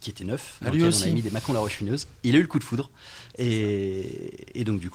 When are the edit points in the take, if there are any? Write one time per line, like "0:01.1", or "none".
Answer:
none